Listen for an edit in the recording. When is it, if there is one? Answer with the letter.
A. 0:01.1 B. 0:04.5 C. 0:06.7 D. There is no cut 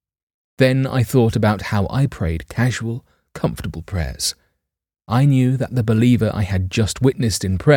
D